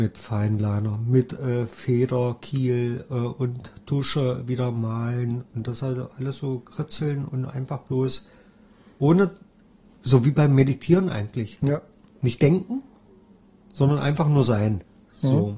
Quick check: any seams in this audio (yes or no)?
no